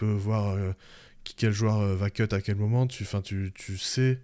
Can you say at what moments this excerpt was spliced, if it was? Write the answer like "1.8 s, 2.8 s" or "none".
none